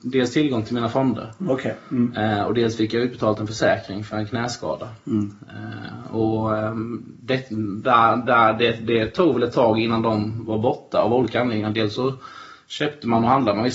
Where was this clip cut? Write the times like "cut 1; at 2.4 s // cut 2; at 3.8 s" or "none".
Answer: none